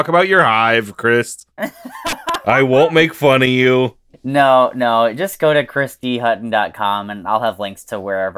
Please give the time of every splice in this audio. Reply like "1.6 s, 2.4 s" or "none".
none